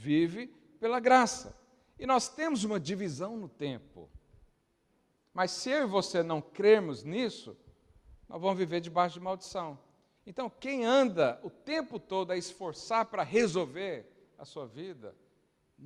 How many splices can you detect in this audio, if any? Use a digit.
2